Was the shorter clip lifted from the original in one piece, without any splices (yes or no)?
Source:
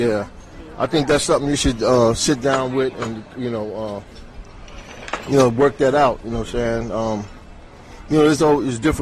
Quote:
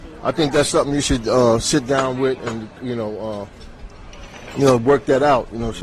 no